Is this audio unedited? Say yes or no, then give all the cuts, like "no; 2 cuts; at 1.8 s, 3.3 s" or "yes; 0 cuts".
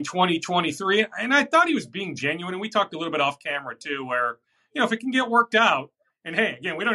yes; 0 cuts